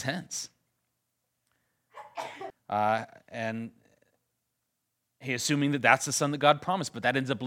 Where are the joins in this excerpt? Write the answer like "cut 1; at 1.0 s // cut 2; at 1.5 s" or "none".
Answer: cut 1; at 2.5 s

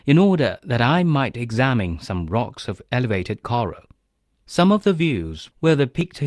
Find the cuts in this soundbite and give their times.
cut 1; at 4.4 s

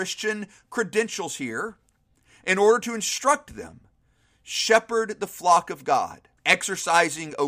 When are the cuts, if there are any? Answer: cut 1; at 6.4 s

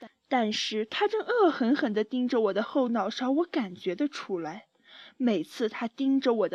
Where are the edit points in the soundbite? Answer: none

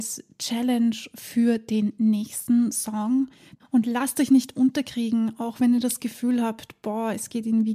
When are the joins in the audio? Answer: cut 1; at 3.6 s

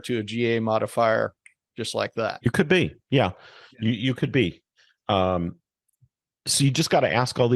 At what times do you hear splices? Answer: none

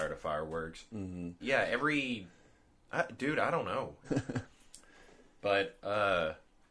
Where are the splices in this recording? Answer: cut 1; at 1.4 s // cut 2; at 4.0 s

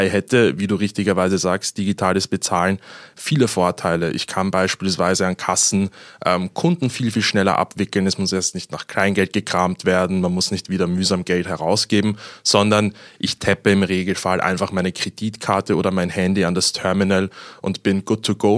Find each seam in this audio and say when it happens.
none

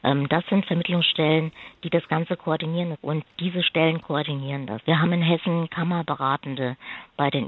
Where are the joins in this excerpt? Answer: cut 1; at 2.9 s // cut 2; at 4.8 s

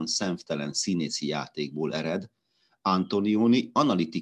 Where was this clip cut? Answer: none

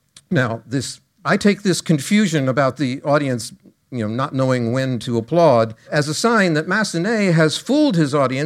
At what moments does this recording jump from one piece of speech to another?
cut 1; at 5.9 s

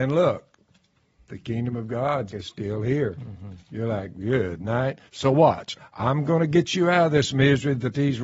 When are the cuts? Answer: cut 1; at 2.3 s // cut 2; at 5.8 s

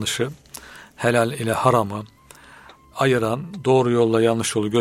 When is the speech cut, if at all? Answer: none

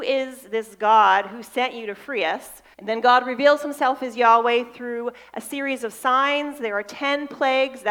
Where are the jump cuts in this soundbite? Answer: cut 1; at 2.7 s

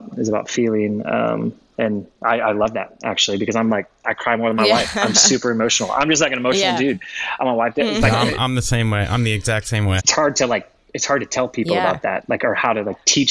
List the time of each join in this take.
cut 1; at 10.0 s

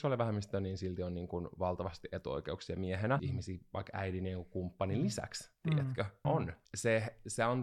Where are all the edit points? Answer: cut 1; at 3.2 s // cut 2; at 6.2 s

